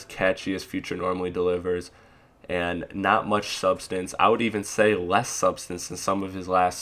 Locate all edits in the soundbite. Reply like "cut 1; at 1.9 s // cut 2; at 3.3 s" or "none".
none